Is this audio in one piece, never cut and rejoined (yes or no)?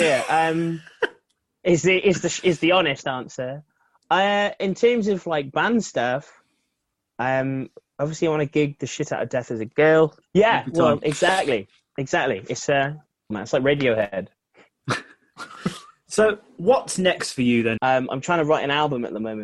no